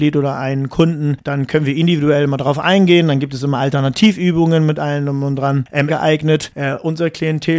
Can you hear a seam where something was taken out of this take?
yes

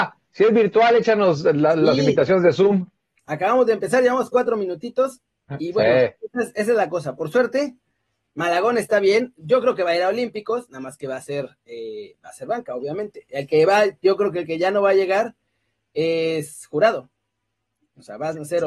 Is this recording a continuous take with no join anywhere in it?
yes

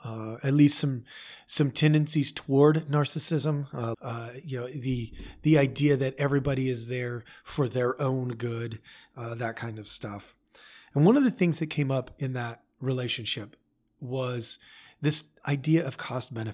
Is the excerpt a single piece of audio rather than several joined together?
no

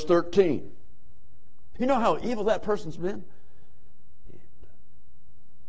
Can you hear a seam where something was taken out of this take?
yes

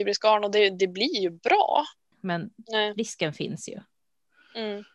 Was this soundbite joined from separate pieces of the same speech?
yes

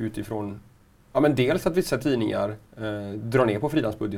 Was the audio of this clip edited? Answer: yes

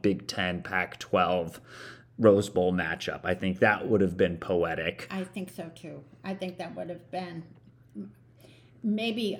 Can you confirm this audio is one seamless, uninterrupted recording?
yes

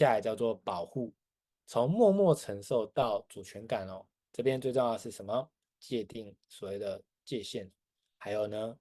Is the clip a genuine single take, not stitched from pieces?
yes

